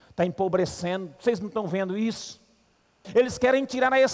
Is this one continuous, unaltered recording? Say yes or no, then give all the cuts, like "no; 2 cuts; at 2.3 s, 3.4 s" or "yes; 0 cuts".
no; 1 cut; at 3.0 s